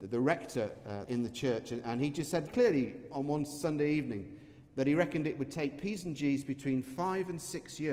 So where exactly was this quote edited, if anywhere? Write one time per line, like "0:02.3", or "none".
0:01.1
0:02.5

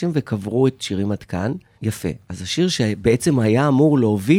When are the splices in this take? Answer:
0:01.8

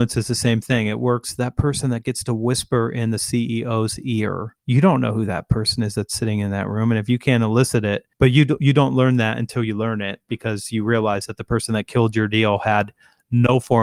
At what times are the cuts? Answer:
0:04.6
0:08.1

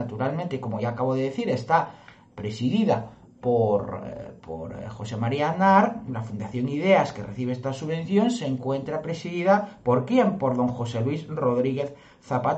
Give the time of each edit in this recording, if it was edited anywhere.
none

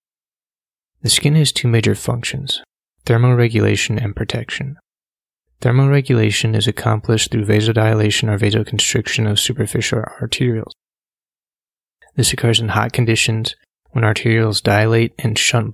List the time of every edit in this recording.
none

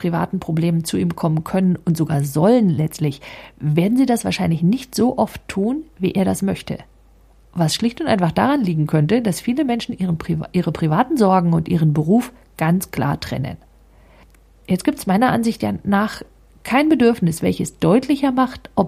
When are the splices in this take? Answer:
none

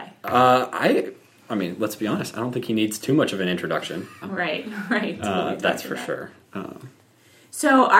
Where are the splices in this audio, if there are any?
0:04.2
0:06.4

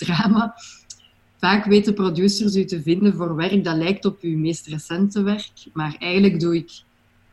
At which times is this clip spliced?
none

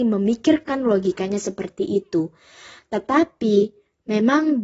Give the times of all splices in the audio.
none

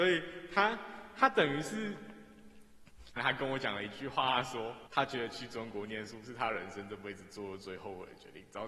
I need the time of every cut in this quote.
0:03.2
0:04.9

